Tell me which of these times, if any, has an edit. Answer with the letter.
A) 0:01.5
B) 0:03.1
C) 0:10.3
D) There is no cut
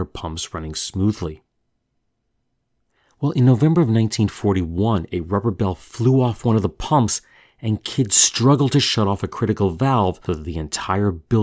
C